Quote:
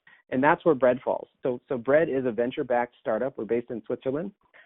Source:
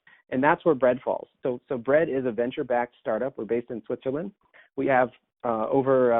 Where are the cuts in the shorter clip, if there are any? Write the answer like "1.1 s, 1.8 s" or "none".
none